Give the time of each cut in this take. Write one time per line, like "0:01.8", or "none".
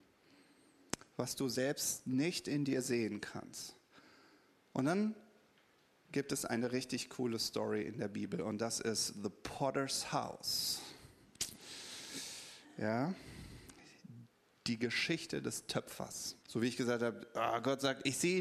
0:16.4